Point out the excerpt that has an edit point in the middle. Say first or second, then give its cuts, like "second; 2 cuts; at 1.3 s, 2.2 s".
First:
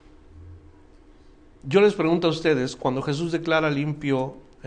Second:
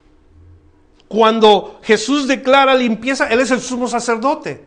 second; 1 cut; at 0.9 s